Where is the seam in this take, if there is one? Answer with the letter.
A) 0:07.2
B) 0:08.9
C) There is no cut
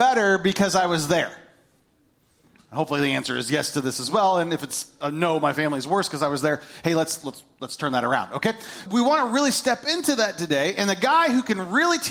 B